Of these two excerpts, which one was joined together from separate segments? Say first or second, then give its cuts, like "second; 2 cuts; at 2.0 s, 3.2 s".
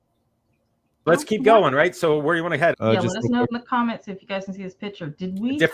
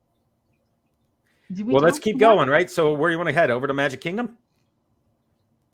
first; 2 cuts; at 1.1 s, 2.7 s